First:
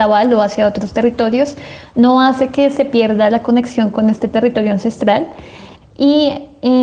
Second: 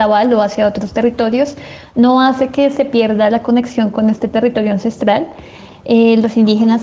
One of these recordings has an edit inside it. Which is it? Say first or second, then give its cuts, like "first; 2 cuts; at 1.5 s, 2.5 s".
first; 1 cut; at 5.8 s